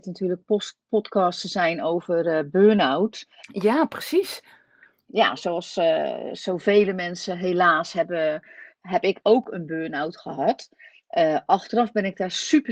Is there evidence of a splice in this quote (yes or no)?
no